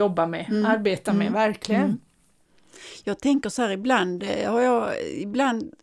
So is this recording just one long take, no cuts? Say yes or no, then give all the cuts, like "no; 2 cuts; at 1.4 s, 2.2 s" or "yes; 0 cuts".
yes; 0 cuts